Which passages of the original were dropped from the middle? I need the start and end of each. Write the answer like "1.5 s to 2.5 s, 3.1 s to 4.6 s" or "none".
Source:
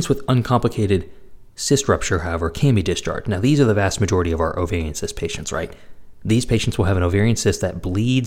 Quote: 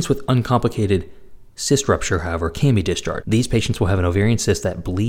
3.2 s to 6.2 s